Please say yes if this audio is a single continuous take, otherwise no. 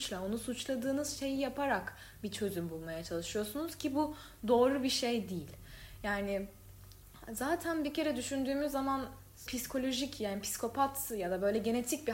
no